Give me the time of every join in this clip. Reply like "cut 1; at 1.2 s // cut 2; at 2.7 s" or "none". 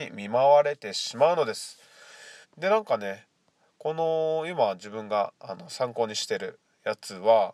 cut 1; at 2.4 s